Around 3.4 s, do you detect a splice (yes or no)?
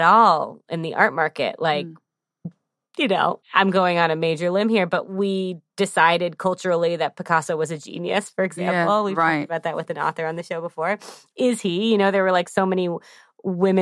yes